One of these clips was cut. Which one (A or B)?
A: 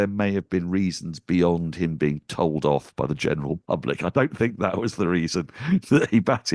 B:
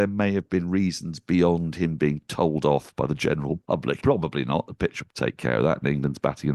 B